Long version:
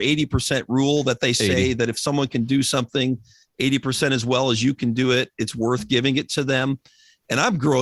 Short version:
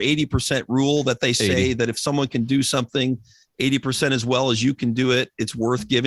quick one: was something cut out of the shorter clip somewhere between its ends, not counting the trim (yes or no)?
no